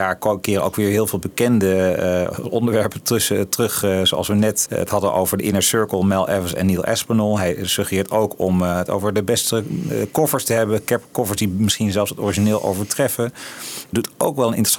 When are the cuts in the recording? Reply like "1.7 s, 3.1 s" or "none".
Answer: 4.7 s